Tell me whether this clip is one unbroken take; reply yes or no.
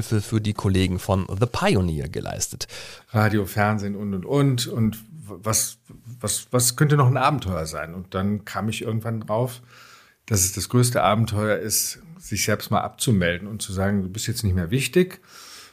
no